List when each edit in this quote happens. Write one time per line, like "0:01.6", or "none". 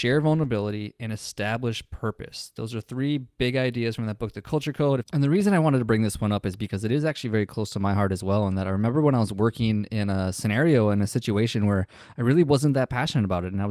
0:05.0